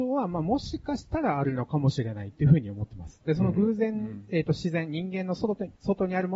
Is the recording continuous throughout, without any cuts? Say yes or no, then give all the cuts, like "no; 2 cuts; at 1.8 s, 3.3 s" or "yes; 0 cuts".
no; 1 cut; at 3.2 s